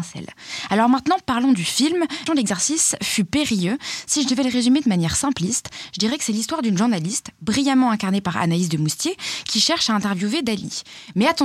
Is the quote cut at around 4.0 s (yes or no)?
no